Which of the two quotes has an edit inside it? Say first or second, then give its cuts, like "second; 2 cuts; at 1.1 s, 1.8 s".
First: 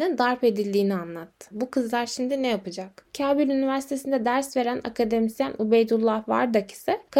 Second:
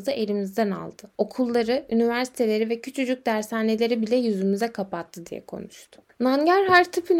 first; 2 cuts; at 1.5 s, 3.1 s